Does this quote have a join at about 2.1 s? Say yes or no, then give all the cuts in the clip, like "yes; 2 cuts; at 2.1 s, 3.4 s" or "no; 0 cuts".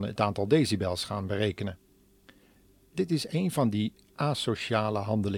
no; 0 cuts